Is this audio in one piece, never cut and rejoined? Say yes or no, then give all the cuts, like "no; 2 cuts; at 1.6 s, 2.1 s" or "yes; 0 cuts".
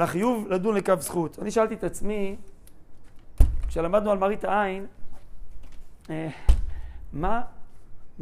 yes; 0 cuts